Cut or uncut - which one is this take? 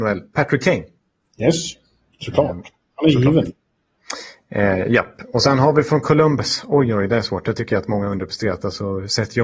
uncut